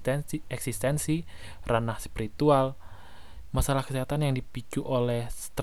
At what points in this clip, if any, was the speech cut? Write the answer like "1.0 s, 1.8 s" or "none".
3.5 s